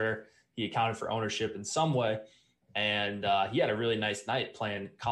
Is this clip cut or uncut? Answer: uncut